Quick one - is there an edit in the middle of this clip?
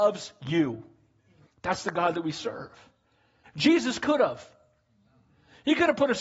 yes; 2 cuts; at 1.5 s, 3.5 s

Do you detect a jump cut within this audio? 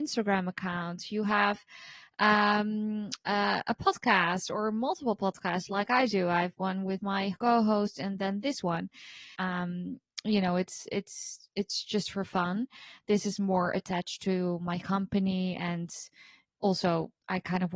yes; 1 cut; at 9.3 s

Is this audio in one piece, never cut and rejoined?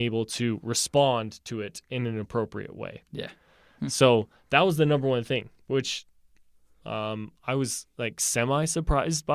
yes; 0 cuts

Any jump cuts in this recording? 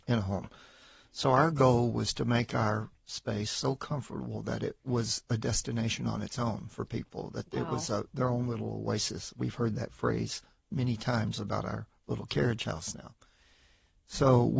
no; 0 cuts

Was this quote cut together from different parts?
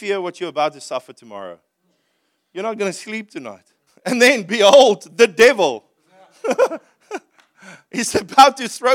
yes; 1 cut; at 3.9 s

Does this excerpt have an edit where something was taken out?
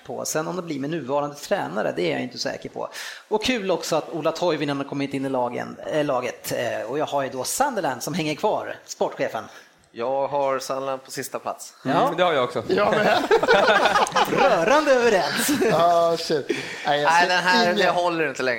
no; 0 cuts

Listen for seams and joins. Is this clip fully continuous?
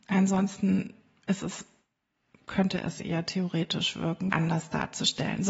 no; 1 cut; at 4.3 s

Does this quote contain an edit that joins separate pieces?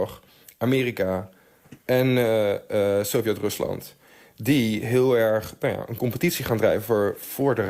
no; 0 cuts

